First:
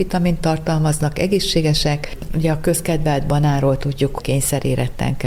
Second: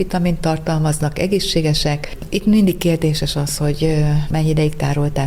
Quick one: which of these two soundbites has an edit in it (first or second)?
first